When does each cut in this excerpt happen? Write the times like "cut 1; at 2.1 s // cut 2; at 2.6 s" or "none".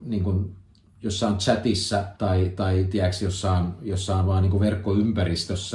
cut 1; at 2.2 s